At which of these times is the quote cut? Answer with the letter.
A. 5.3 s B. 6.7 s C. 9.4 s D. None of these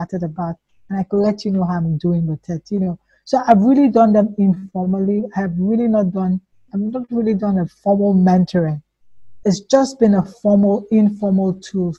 B